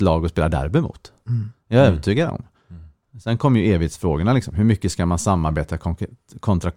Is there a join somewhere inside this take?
no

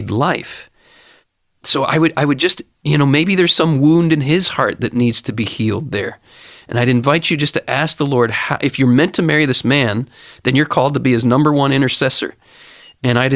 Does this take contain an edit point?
no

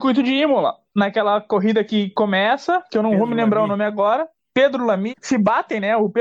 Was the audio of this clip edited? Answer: yes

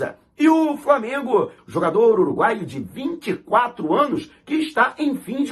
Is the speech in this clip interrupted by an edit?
yes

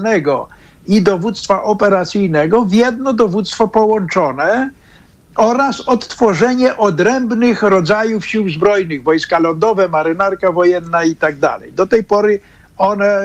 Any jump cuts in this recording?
no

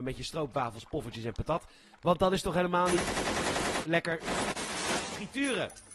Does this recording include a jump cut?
no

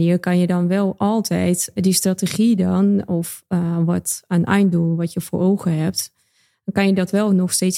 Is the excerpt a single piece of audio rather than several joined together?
no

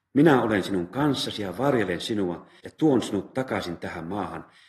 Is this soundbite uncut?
no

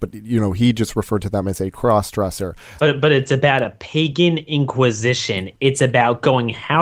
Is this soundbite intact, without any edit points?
no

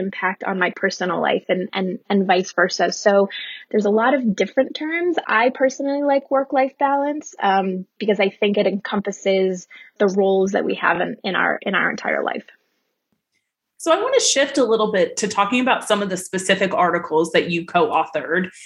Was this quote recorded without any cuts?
yes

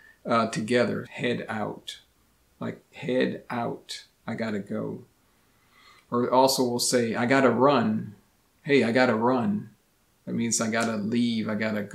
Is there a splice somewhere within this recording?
yes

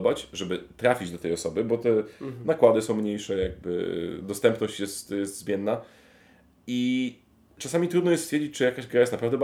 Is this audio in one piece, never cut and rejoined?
yes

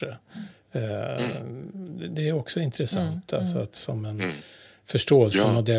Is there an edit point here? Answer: no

